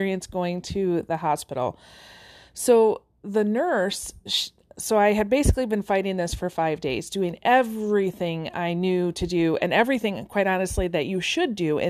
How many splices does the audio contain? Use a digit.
0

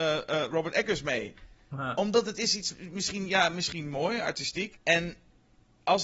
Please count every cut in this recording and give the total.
1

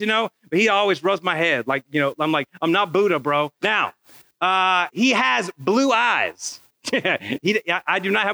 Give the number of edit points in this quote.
3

